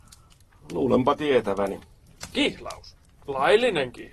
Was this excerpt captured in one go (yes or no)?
yes